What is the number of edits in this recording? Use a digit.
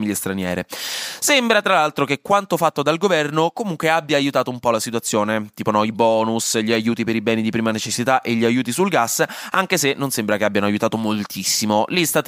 0